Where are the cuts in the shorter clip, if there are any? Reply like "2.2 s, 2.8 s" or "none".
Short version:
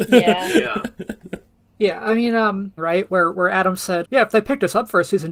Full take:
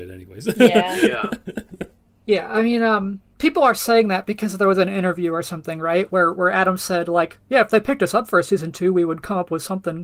2.8 s, 4.0 s